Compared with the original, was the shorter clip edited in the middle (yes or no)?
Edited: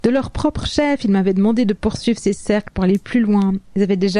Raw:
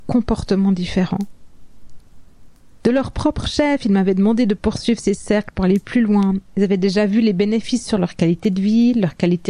no